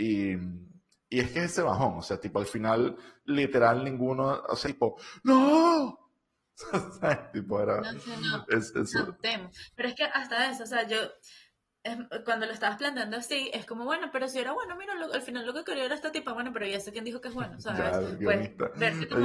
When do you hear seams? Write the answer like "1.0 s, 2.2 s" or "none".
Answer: 4.6 s